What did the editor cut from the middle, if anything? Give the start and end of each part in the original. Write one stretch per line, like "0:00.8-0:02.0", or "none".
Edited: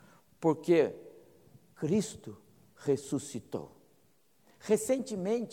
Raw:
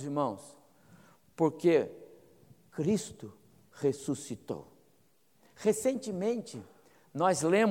none